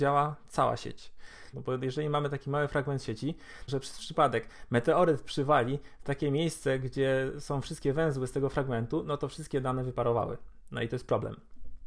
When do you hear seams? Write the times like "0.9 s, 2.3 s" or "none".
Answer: 1.5 s, 3.7 s